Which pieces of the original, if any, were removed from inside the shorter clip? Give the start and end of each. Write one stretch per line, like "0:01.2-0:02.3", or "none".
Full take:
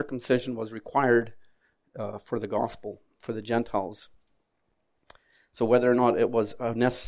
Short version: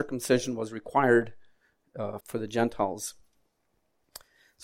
0:02.2-0:03.1